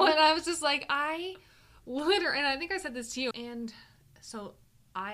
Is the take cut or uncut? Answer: cut